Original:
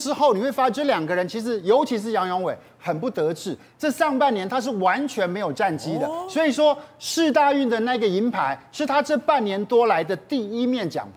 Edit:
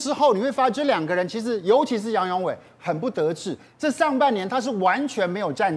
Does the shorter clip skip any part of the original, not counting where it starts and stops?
no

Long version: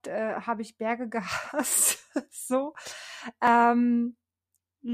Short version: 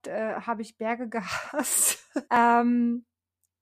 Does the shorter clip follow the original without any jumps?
no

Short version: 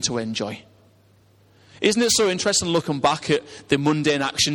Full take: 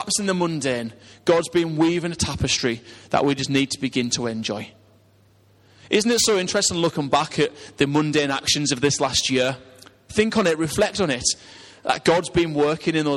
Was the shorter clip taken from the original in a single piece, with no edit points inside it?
yes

